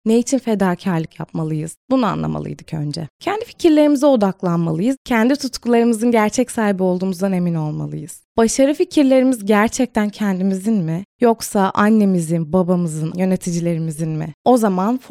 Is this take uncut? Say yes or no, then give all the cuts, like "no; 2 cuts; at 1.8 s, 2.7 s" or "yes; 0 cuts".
no; 1 cut; at 13.1 s